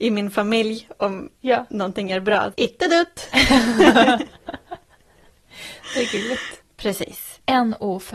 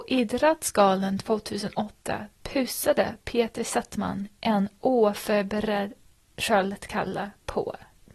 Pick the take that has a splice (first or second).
first